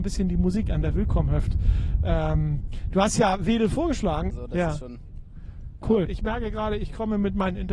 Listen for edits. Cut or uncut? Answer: cut